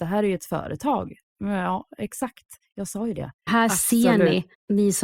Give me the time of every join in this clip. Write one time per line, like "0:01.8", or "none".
0:03.5